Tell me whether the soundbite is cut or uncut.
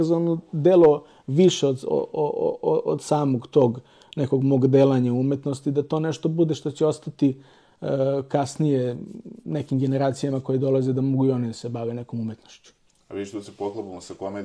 uncut